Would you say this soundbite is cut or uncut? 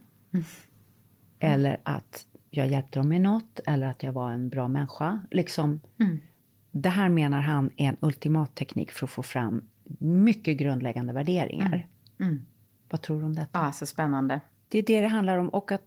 cut